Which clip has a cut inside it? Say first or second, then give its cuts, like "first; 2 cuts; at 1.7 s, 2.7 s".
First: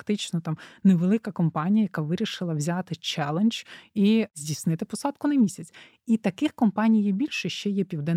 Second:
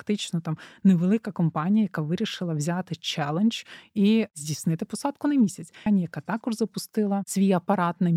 second; 1 cut; at 5.9 s